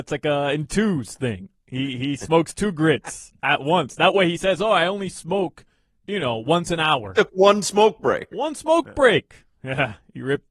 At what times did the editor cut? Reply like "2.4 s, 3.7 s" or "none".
none